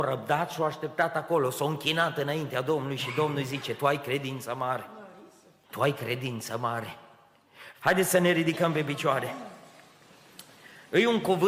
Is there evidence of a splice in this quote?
yes; 2 cuts; at 5.6 s, 7.7 s

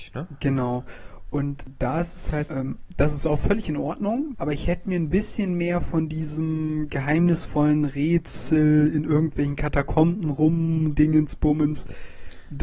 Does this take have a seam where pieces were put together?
yes; 3 cuts; at 2.5 s, 4.3 s, 10.9 s

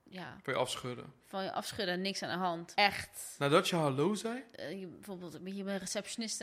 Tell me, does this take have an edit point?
yes; 2 cuts; at 2.7 s, 4.5 s

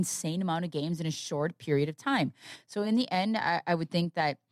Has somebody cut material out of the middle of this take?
no; 0 cuts

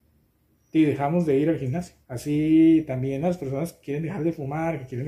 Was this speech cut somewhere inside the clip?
yes; 1 cut; at 2.0 s

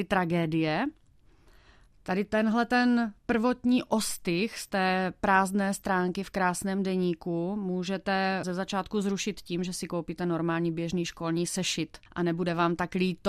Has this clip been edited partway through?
no; 0 cuts

